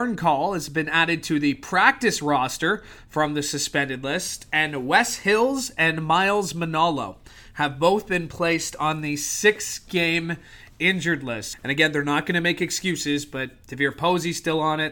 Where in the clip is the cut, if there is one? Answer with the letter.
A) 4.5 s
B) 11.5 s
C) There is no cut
B